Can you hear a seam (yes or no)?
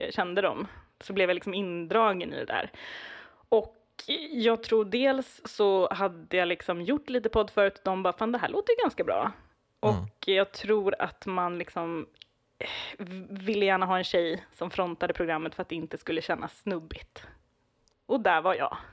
no